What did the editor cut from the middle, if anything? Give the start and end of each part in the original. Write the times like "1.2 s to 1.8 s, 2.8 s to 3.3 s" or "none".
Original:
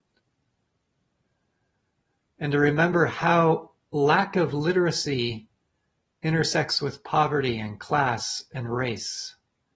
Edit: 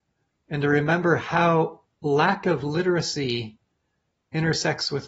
none